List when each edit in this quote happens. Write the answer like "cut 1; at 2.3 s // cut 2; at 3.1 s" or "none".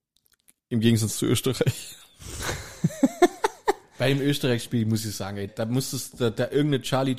cut 1; at 5.5 s

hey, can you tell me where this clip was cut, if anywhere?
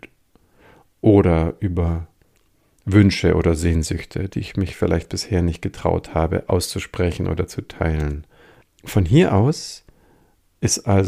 cut 1; at 8.6 s

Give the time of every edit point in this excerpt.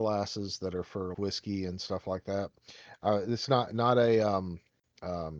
cut 1; at 1.1 s

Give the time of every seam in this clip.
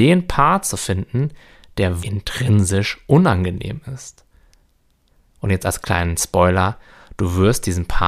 cut 1; at 2.0 s

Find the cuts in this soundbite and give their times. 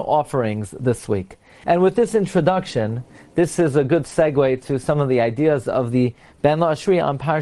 cut 1; at 1.6 s

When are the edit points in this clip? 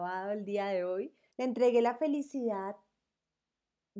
cut 1; at 1.3 s

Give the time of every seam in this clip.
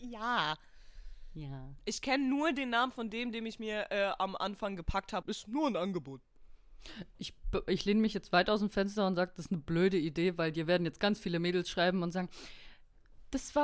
cut 1; at 5.2 s

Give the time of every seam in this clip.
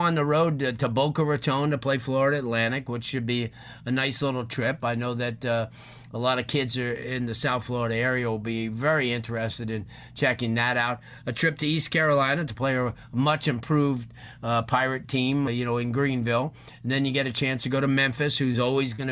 cut 1; at 15.5 s

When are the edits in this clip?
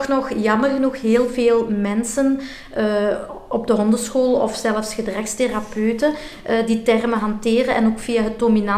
none

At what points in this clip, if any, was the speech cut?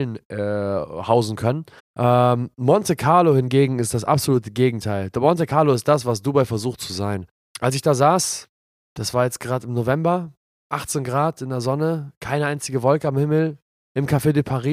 cut 1; at 1.8 s

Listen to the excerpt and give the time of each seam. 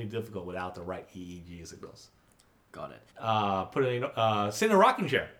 cut 1; at 3.1 s

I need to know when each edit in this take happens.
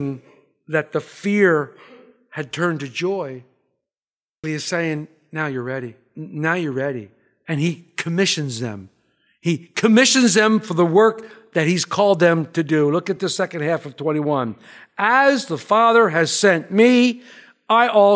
cut 1; at 4.4 s

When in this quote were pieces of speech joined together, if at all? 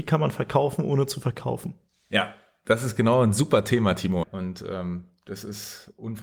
cut 1; at 4.2 s

